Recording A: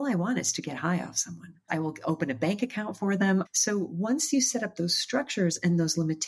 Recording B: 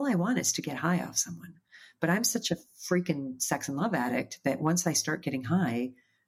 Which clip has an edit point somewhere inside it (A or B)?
A